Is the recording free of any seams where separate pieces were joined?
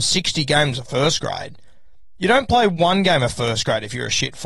yes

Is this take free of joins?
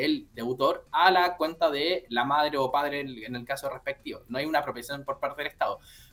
yes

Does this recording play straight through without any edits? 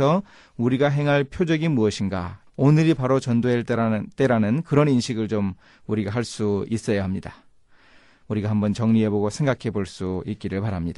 no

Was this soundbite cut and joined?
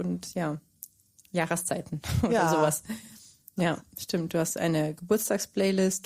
no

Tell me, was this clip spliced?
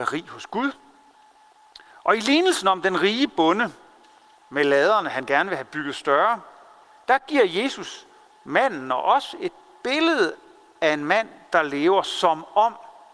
no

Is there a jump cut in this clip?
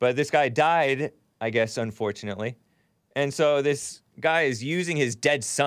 no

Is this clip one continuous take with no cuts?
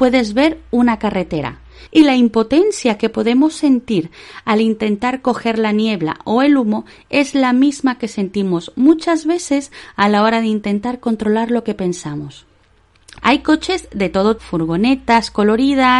no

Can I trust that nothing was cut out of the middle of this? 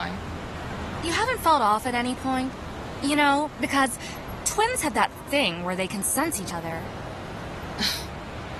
yes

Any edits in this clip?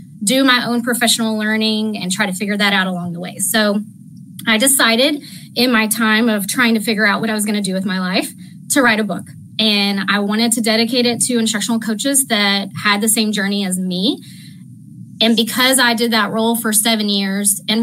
no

